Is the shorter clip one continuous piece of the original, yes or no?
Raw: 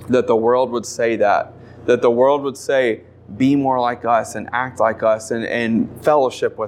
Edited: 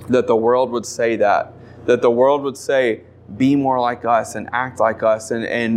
yes